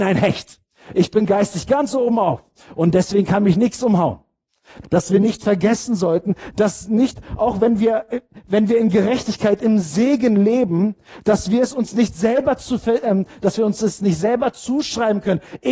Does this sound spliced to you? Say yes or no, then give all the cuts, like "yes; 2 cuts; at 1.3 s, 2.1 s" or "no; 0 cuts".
yes; 1 cut; at 4.8 s